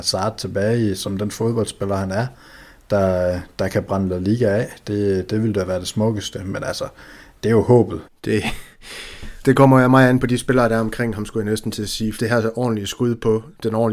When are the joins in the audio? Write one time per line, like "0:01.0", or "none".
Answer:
0:08.0
0:09.4
0:12.2